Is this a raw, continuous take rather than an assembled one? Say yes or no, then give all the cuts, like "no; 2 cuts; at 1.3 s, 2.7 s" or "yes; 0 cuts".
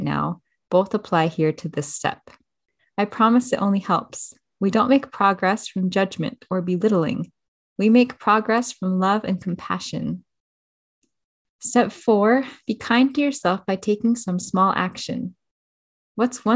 no; 1 cut; at 2.8 s